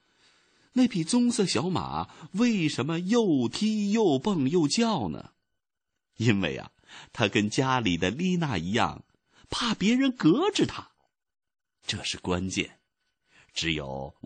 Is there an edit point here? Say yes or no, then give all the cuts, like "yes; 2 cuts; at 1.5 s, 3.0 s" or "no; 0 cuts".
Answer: no; 0 cuts